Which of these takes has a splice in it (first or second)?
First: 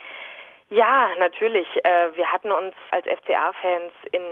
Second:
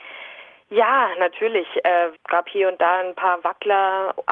second